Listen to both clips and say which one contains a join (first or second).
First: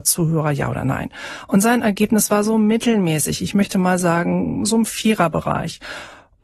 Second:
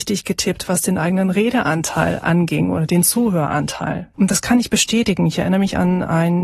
second